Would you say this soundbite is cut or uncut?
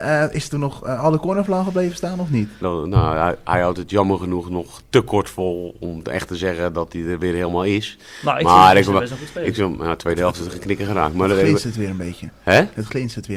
cut